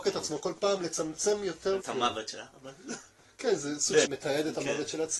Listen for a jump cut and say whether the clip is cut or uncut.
cut